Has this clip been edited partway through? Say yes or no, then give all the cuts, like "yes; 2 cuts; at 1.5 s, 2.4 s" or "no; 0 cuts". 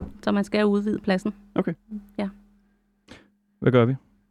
no; 0 cuts